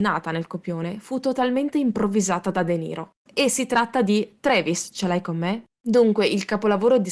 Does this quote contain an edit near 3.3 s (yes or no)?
yes